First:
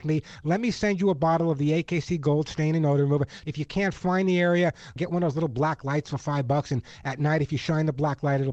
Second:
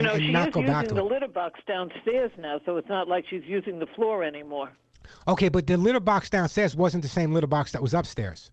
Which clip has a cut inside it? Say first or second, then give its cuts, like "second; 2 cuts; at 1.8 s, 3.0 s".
first; 2 cuts; at 3.4 s, 5.0 s